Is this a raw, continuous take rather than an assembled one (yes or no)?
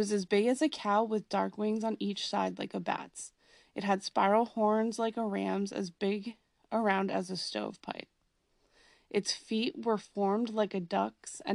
yes